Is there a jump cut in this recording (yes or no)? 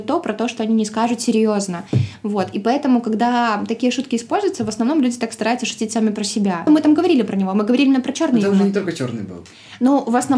yes